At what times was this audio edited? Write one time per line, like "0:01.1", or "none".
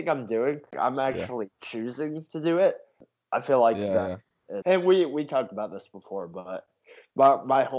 0:04.6